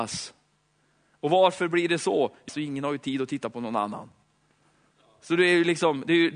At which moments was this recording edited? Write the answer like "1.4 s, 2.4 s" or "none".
2.5 s

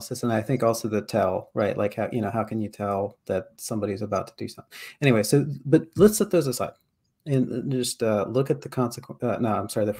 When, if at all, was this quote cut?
none

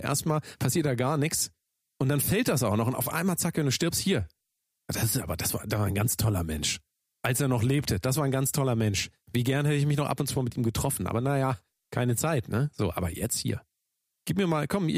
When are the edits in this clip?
none

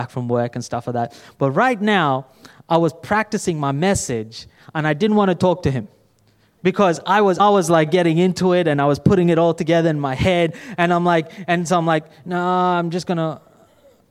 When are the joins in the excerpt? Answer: 7.4 s

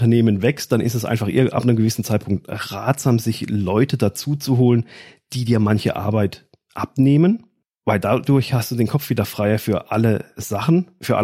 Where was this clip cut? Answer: none

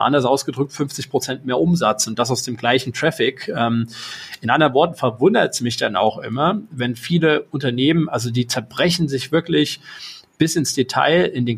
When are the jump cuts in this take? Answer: none

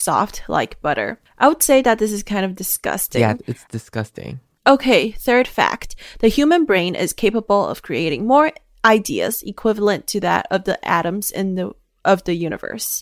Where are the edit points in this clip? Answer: 4.6 s

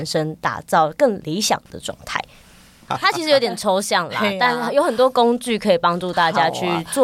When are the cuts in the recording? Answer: none

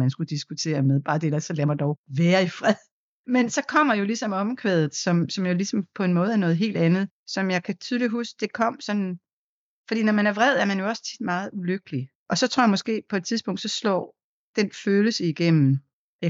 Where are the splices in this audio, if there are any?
none

